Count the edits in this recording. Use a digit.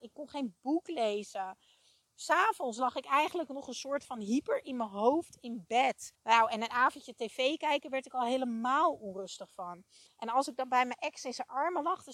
1